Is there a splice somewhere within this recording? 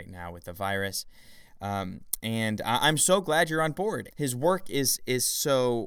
yes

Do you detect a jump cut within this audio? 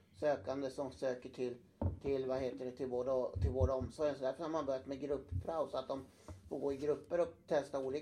no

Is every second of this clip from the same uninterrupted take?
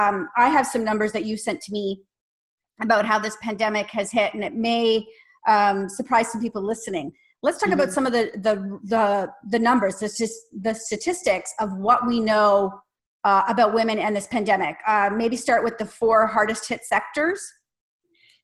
yes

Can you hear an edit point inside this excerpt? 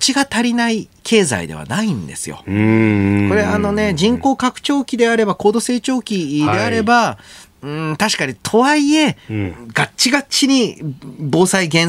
no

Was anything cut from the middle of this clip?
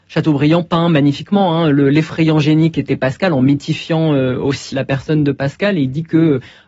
yes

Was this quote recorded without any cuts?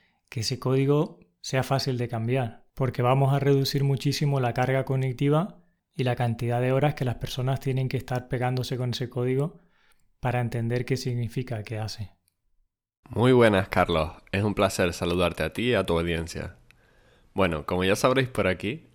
no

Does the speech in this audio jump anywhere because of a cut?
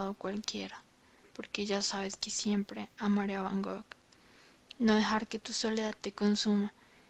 yes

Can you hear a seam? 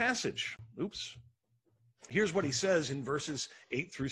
no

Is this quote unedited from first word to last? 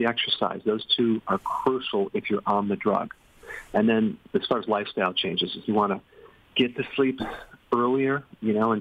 no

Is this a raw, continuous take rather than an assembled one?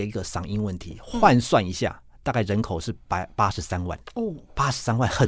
yes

